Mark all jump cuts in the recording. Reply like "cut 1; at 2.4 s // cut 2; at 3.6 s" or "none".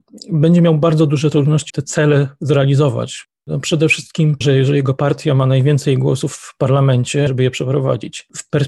cut 1; at 1.7 s // cut 2; at 4.4 s // cut 3; at 7.3 s